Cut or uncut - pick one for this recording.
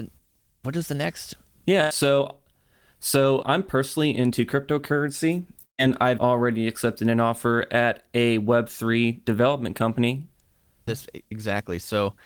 cut